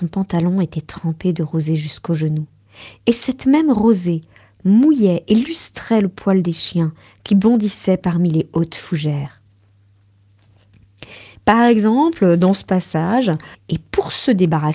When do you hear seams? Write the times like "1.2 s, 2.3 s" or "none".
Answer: 11.4 s, 13.5 s